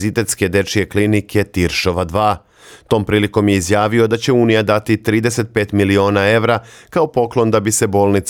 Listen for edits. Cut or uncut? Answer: uncut